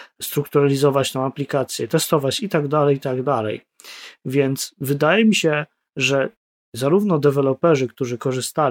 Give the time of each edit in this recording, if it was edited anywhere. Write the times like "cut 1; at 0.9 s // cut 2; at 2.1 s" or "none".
none